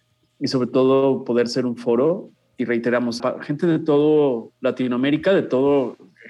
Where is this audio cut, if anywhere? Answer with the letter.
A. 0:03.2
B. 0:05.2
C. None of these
A